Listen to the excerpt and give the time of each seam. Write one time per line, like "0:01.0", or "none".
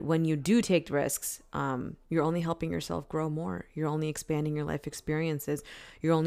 0:02.0